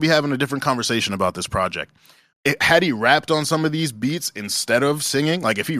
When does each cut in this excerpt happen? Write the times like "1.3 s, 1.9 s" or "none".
2.3 s